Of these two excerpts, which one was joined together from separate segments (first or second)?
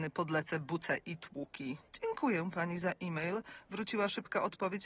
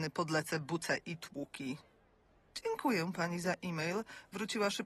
first